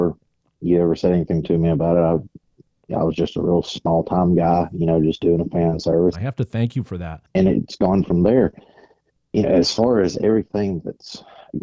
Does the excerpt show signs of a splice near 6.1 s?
yes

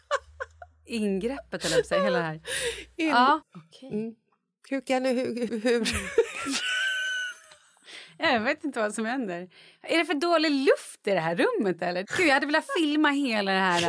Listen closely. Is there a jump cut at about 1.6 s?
no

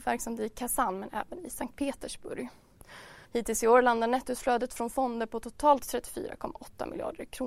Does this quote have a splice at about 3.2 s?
yes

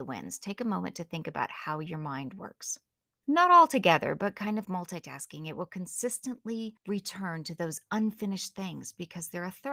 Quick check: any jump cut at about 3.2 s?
yes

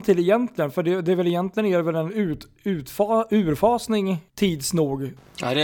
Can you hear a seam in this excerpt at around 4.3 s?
yes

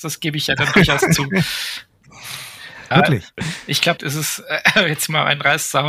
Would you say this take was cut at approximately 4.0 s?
yes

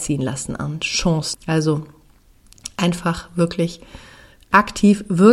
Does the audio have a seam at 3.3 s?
no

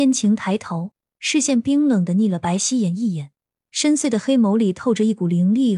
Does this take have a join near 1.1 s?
no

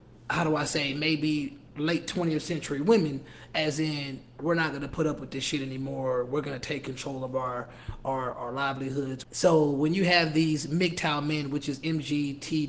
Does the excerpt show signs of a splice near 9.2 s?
yes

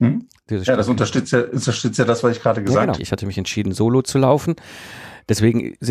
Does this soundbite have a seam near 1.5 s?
no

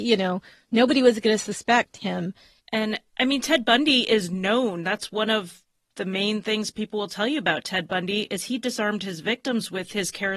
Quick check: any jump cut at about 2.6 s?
yes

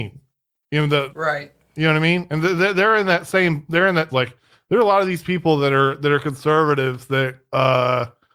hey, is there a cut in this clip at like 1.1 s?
yes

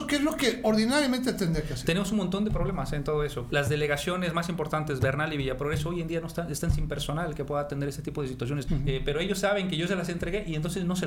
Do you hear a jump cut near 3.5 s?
yes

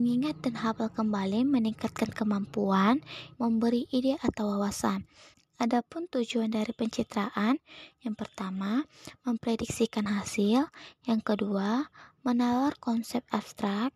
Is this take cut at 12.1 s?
no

